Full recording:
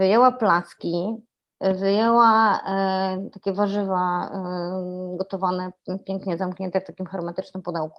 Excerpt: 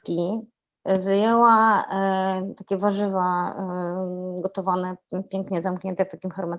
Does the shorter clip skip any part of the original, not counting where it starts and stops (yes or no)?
no